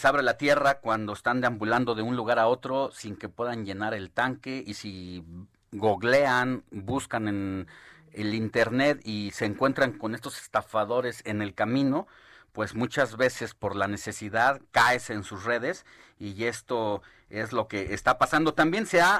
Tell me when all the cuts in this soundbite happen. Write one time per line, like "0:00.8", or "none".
none